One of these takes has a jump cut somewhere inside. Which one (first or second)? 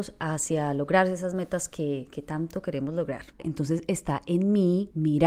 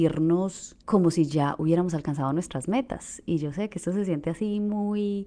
first